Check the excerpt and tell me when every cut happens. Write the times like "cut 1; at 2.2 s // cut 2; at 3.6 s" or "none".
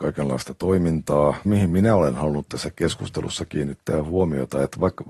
cut 1; at 1.4 s